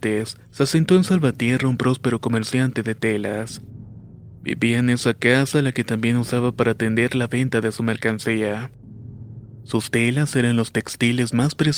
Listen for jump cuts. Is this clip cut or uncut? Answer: uncut